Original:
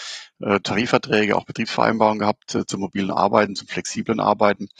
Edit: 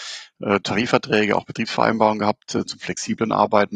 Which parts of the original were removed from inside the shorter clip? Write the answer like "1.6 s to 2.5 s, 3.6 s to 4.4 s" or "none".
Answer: 2.7 s to 3.5 s